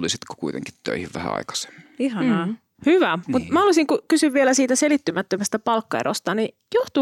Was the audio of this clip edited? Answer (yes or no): yes